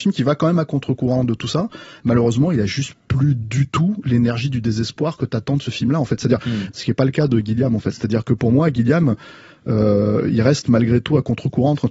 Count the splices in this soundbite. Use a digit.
1